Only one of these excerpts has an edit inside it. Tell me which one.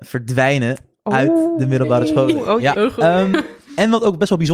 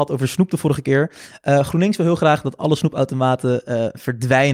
first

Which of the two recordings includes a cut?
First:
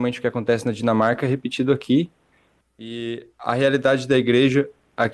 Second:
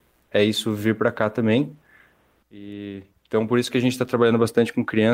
first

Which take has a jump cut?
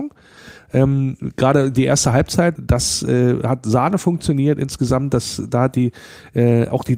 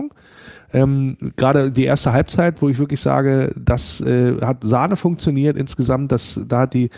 first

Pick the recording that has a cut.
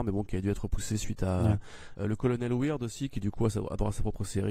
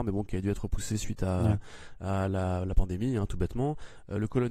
first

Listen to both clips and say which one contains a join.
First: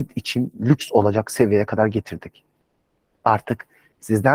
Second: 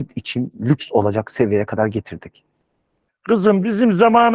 second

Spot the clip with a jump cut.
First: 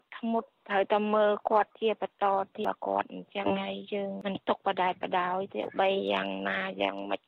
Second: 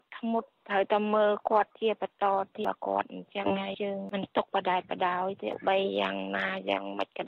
second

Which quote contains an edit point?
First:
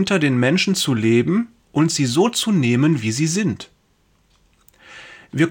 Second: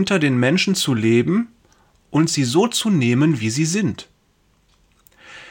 first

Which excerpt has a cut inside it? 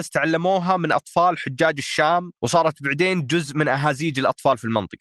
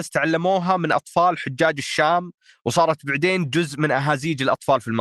first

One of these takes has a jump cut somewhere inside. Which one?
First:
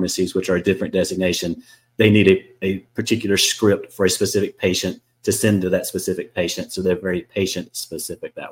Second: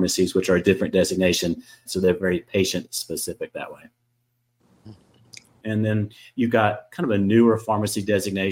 second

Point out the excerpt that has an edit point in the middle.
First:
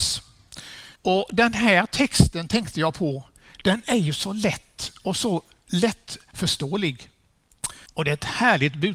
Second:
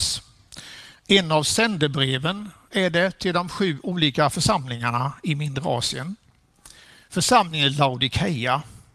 first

